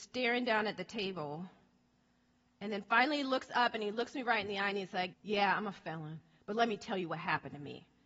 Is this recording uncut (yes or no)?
no